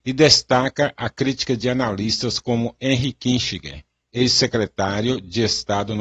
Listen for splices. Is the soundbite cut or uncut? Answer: uncut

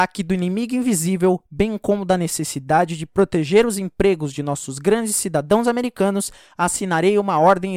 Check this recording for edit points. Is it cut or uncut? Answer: uncut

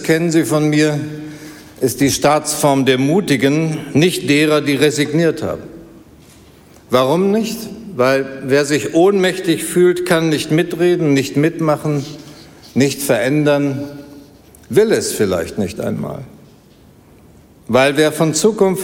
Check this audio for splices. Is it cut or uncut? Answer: uncut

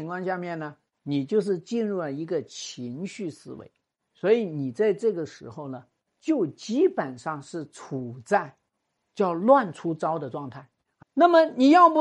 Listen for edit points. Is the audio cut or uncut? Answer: cut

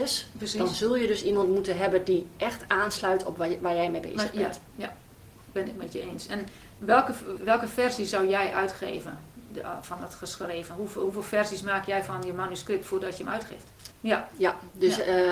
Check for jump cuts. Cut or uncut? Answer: cut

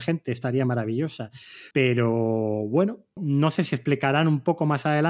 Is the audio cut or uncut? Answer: cut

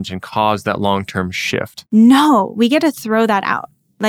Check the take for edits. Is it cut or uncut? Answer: cut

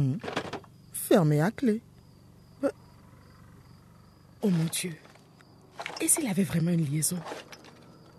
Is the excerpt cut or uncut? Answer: cut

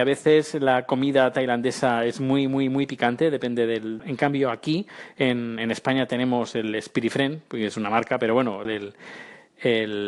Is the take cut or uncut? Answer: cut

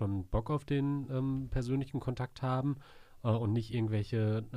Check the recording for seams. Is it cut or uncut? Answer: uncut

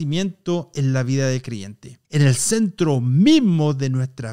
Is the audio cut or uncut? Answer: cut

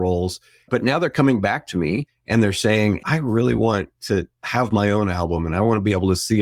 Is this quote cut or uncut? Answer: cut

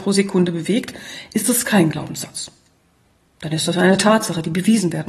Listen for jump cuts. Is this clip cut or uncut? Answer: uncut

